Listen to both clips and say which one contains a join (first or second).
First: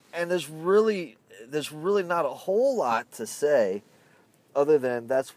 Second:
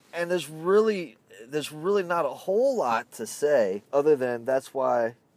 second